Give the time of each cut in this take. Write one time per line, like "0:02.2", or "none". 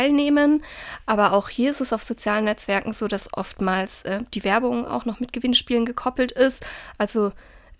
none

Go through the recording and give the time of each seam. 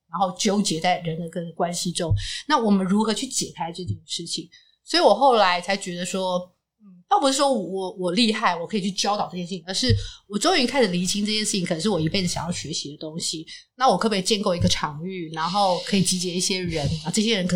none

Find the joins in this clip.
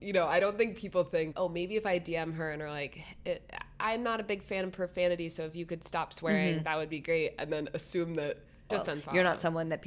0:01.3
0:08.7

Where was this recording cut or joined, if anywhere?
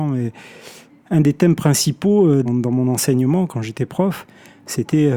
0:02.4

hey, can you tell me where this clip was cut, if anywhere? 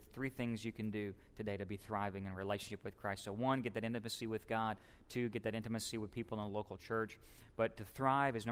none

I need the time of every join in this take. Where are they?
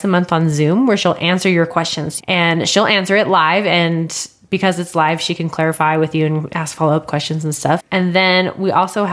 0:02.2
0:07.8

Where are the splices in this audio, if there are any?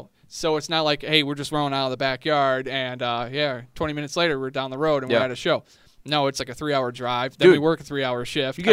none

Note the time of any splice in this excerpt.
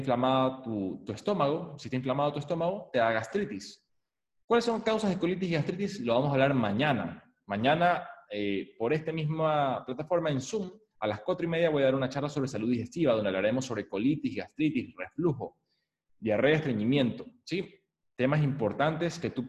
none

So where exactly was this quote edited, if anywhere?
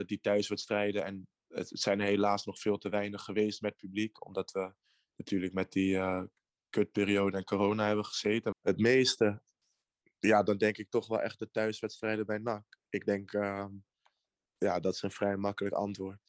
0:08.5

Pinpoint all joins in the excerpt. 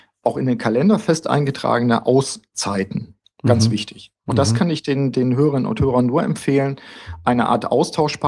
0:04.3

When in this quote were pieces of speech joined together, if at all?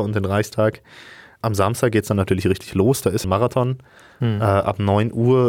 0:03.2

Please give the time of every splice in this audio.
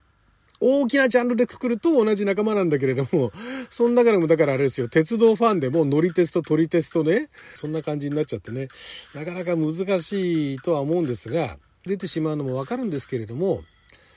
0:07.6
0:11.9

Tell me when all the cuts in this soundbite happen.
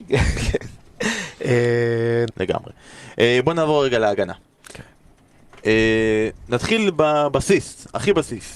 0:02.3

